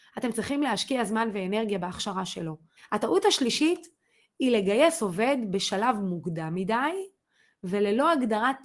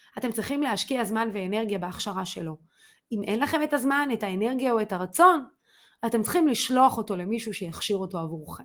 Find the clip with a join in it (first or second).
first